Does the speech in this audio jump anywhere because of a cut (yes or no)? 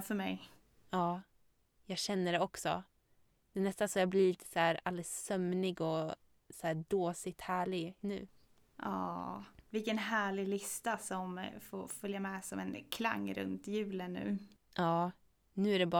yes